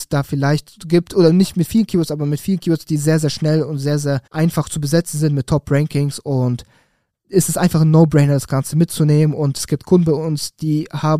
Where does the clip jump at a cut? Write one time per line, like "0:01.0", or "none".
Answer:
0:04.3